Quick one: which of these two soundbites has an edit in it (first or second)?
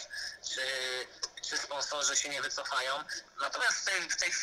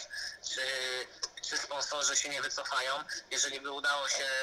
first